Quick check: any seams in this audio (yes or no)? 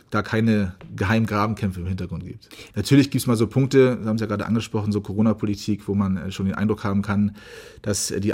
yes